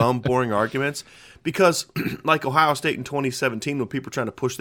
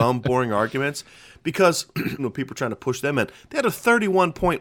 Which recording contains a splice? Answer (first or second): second